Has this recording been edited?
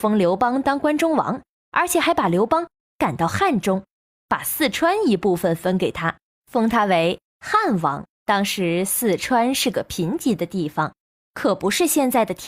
yes; 1 cut; at 8.1 s

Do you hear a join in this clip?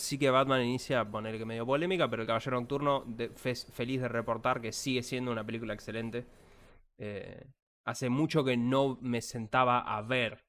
no; 0 cuts

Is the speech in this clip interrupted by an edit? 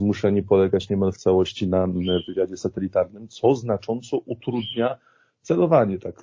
no; 0 cuts

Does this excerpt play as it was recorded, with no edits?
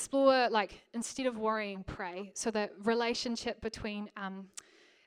yes; 0 cuts

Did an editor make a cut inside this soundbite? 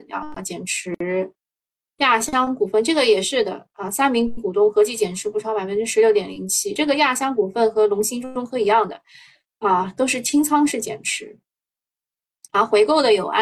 no; 0 cuts

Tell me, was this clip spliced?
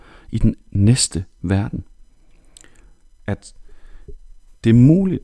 yes; 1 cut; at 3.2 s

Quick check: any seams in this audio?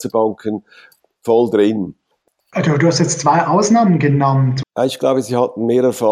yes; 1 cut; at 4.6 s

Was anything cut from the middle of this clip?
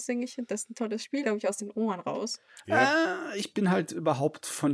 yes; 1 cut; at 1.2 s

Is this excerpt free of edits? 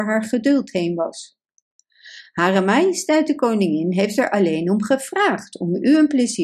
yes; 0 cuts

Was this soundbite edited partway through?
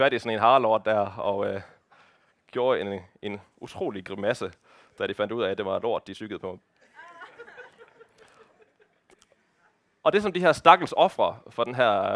no; 0 cuts

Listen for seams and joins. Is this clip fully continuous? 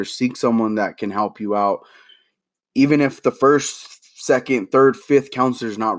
no; 1 cut; at 5.0 s

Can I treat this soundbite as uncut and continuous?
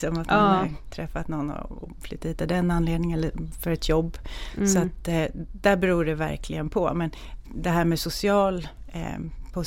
yes; 0 cuts

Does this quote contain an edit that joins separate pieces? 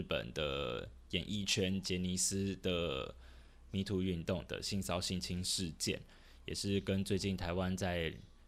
no; 0 cuts

